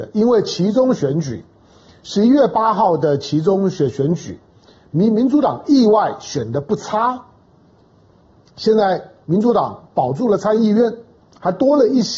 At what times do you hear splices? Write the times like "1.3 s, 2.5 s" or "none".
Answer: none

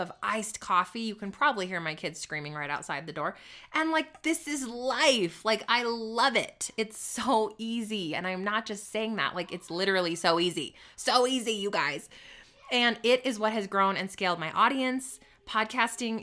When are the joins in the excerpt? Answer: none

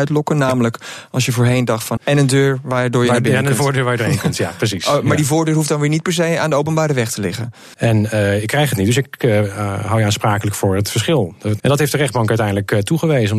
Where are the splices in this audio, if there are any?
2.0 s, 7.7 s, 11.6 s

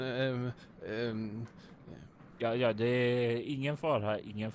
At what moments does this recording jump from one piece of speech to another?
none

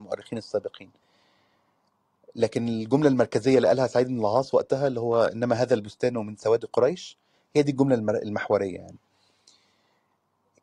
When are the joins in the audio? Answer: none

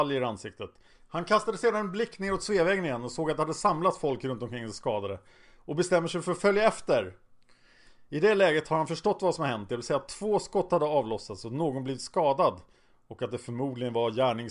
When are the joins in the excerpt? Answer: 0.9 s

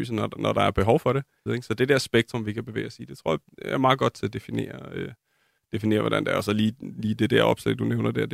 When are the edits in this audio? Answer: 1.5 s

